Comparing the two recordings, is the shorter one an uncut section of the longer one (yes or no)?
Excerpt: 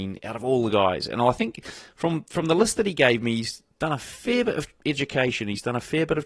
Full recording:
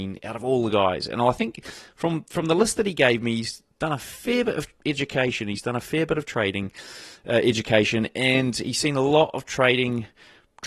yes